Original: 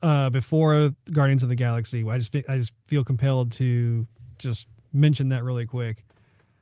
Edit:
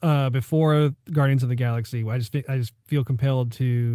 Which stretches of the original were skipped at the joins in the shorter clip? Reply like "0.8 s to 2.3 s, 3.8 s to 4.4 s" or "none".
none